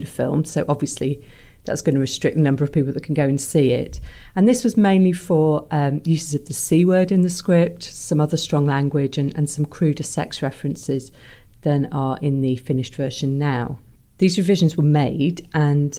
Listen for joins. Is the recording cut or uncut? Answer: uncut